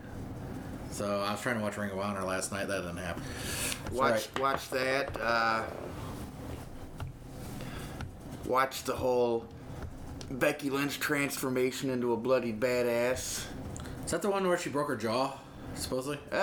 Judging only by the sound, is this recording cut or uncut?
cut